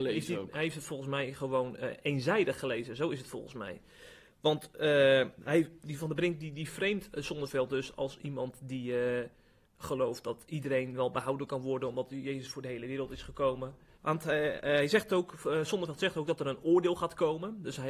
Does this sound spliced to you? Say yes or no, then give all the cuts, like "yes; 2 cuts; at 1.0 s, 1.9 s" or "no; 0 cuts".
yes; 1 cut; at 14.0 s